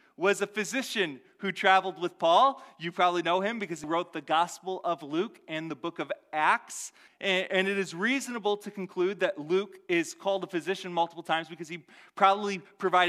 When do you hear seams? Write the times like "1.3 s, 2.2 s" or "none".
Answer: 3.8 s, 7.1 s